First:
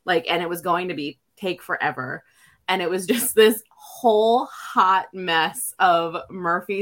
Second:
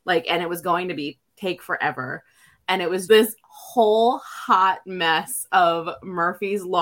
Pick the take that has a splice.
second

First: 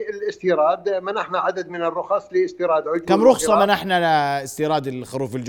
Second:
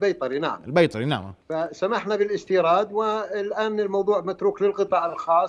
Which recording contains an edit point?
second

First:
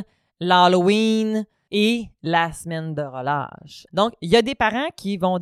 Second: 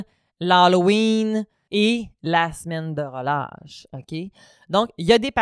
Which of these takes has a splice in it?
first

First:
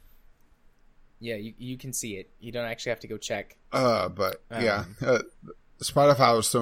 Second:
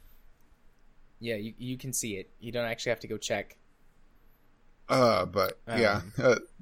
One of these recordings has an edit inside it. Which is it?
first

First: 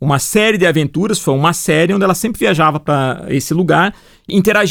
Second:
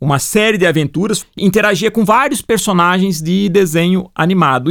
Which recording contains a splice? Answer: second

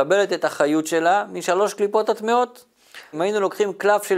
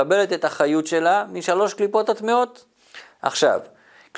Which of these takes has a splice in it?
first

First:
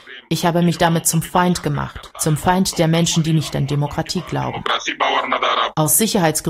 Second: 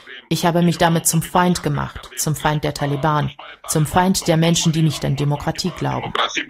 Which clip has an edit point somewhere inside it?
first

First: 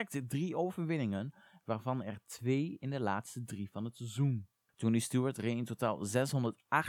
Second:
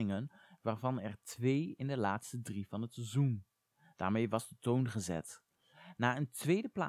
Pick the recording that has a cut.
first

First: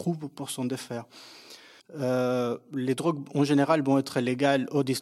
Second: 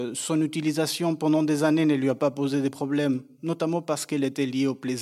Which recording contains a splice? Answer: first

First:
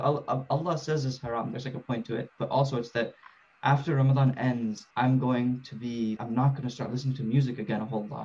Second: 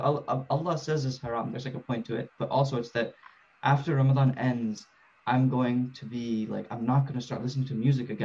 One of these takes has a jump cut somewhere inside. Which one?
first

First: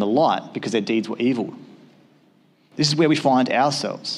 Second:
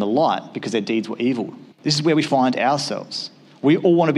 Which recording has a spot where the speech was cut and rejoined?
second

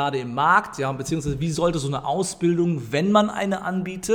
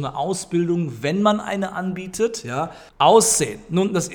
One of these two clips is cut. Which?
second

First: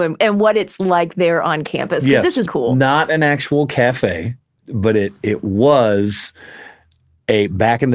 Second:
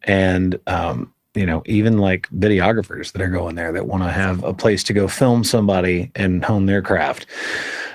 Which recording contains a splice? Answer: first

